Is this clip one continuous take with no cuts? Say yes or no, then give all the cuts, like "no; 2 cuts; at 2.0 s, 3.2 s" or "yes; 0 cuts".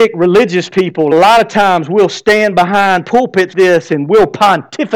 no; 2 cuts; at 1.1 s, 3.5 s